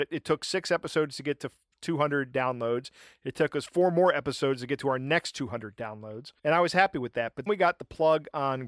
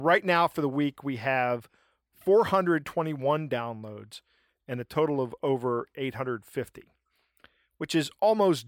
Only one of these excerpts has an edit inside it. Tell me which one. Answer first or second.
first